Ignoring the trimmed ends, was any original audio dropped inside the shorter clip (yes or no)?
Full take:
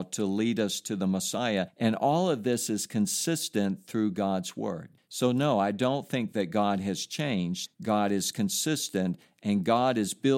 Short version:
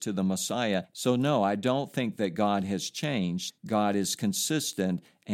yes